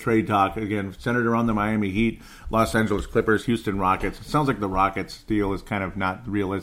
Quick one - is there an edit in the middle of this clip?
no; 0 cuts

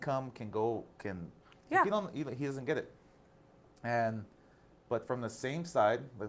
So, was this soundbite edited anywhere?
no; 0 cuts

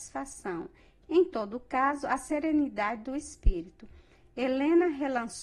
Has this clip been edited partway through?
no; 0 cuts

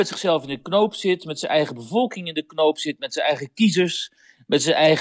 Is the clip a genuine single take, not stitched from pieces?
yes; 0 cuts

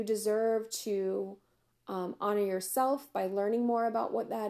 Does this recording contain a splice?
no; 0 cuts

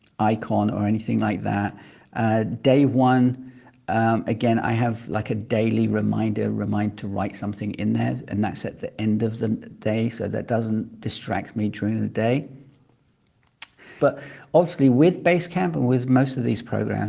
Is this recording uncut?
no; 1 cut; at 14.0 s

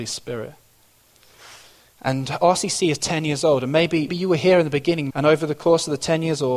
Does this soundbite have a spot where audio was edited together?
yes; 2 cuts; at 4.1 s, 5.1 s

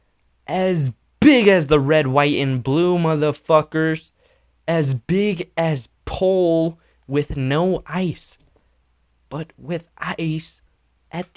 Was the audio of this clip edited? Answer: no; 0 cuts

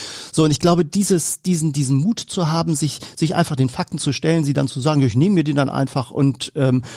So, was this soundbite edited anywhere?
no; 0 cuts

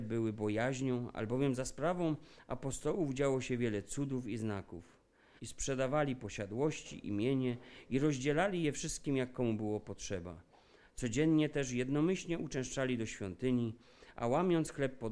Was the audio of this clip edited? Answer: yes; 1 cut; at 5.4 s

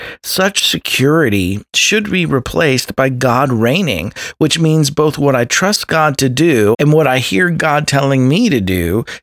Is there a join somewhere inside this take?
yes; 1 cut; at 6.7 s

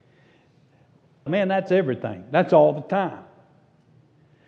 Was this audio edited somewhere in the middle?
yes; 1 cut; at 1.3 s

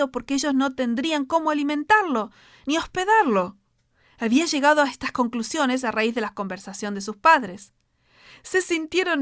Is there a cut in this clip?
yes; 1 cut; at 2.6 s

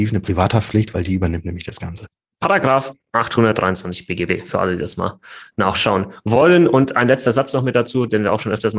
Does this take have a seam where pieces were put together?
no; 0 cuts

